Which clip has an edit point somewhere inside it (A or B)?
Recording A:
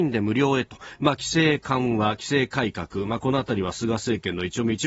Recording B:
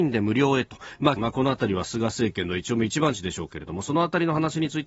B